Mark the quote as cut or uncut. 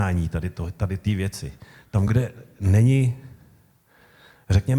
uncut